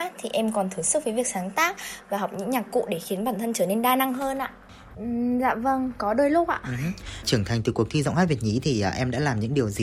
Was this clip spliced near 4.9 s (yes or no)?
yes